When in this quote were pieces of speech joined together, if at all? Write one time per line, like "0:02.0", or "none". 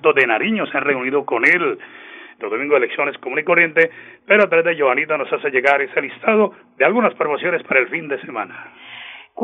0:02.4